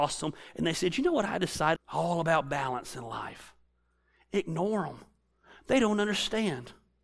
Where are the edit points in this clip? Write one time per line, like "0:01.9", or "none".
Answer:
0:01.8